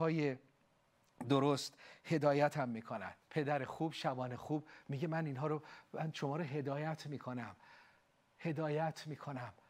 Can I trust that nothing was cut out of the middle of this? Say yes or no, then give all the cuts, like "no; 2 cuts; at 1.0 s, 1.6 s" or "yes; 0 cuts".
no; 1 cut; at 3.2 s